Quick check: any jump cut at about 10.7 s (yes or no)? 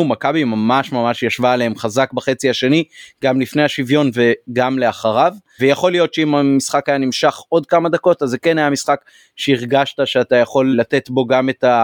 yes